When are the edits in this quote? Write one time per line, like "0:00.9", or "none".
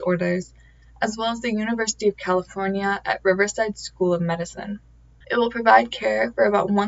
0:05.2